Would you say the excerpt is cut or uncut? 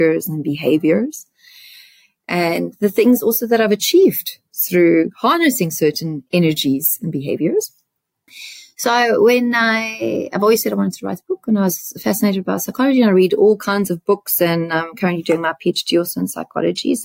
cut